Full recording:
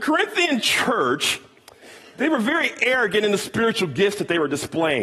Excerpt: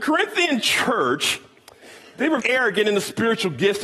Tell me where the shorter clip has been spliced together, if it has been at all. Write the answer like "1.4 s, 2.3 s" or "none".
2.4 s